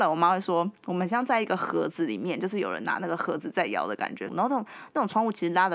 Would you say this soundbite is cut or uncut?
cut